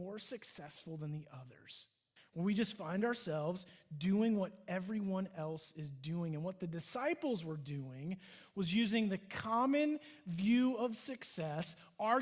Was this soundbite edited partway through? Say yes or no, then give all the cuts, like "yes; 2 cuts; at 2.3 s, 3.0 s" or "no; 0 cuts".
yes; 1 cut; at 2.2 s